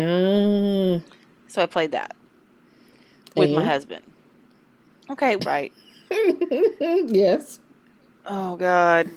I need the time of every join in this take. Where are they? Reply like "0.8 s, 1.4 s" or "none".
5.4 s, 8.2 s